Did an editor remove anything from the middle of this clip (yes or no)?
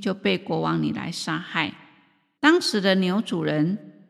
yes